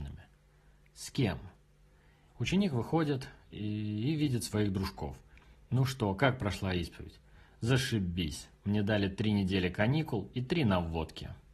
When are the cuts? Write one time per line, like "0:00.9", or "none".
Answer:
0:02.3